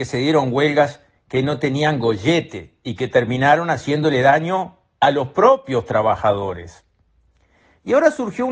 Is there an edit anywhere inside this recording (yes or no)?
no